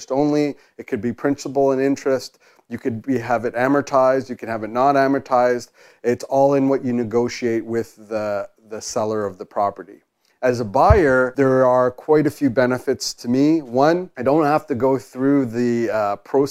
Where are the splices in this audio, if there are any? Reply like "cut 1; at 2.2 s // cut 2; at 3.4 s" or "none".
none